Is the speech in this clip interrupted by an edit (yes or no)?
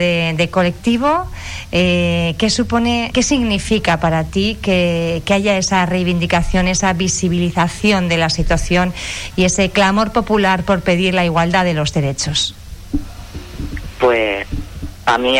yes